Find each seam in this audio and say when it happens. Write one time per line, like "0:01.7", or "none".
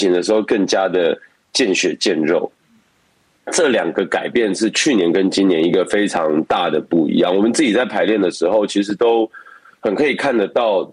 0:03.4

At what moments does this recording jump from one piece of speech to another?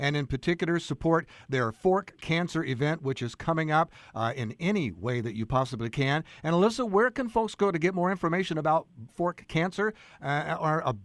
0:09.1

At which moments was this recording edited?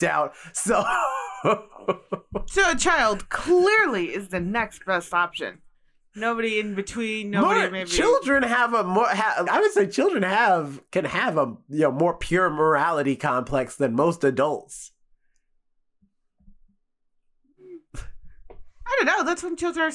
0:09.5
0:17.9

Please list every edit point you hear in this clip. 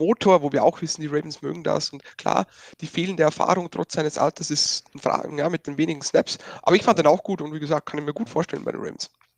0:05.3

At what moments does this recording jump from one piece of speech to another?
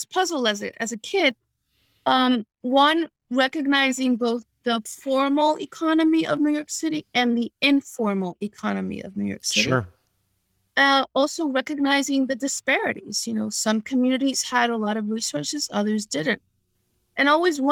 none

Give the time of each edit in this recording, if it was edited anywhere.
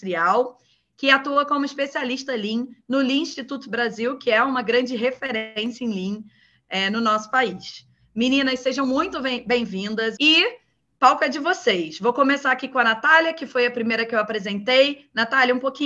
0:10.2

